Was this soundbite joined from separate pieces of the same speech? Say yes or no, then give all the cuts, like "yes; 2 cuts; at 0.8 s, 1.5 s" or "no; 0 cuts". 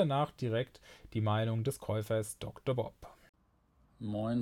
no; 0 cuts